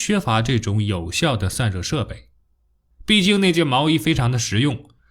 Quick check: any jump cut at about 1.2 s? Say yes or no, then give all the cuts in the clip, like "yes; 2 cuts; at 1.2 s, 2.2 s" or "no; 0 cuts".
no; 1 cut; at 2.9 s